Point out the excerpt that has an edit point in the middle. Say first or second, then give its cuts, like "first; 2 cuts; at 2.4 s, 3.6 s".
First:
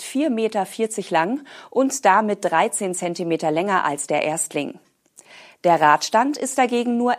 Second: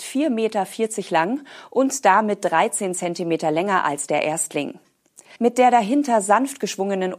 second; 1 cut; at 5.4 s